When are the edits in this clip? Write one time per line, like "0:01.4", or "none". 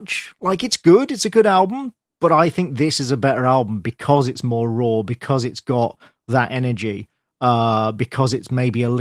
none